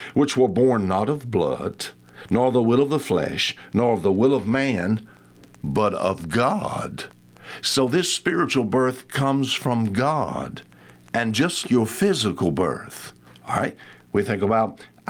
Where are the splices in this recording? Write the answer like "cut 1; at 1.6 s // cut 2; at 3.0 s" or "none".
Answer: cut 1; at 11.6 s